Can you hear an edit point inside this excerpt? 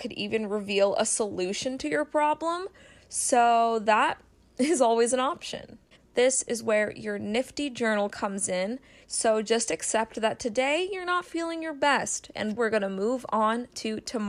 yes; 3 cuts; at 6.0 s, 9.0 s, 12.6 s

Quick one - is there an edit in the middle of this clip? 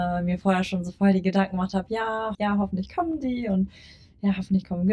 yes; 1 cut; at 2.3 s

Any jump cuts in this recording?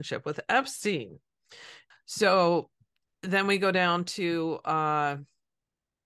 yes; 1 cut; at 1.9 s

